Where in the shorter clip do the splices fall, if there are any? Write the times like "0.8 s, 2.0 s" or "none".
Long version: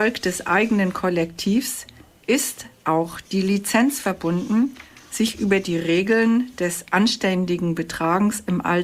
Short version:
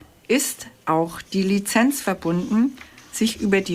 none